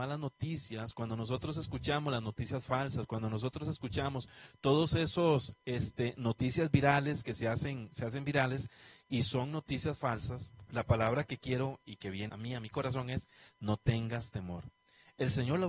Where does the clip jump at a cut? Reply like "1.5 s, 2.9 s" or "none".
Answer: 10.7 s, 12.3 s

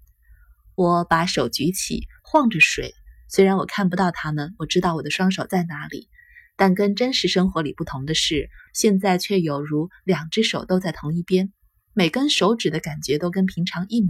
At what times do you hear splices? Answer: 8.7 s

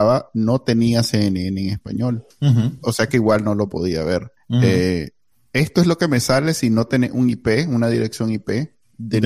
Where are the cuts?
none

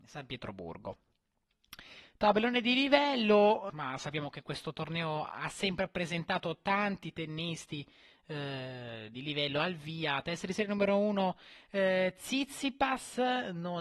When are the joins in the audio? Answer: 3.7 s

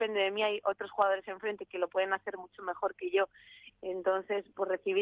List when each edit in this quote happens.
3.7 s

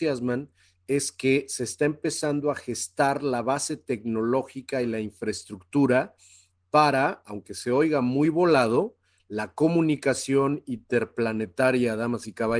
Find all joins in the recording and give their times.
none

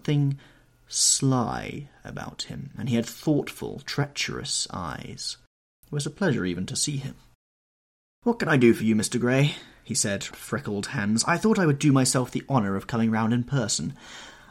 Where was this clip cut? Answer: 5.8 s, 10.3 s

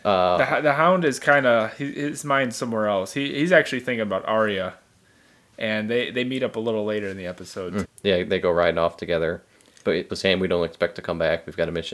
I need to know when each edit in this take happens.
7.8 s, 10.1 s

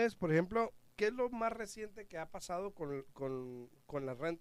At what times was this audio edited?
none

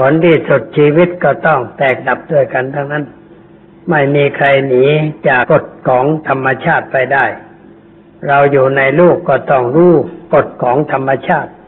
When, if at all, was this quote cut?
5.4 s

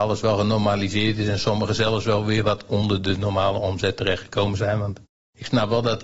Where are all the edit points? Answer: none

